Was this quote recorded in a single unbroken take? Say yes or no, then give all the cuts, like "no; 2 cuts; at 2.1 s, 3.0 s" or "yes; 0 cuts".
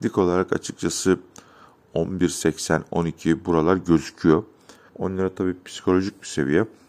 no; 1 cut; at 4.9 s